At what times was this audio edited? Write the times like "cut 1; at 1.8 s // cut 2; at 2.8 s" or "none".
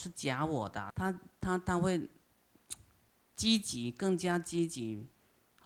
none